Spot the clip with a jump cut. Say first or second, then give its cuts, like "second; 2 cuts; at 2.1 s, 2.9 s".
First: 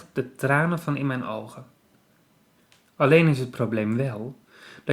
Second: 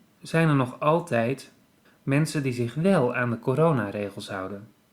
second; 1 cut; at 1.8 s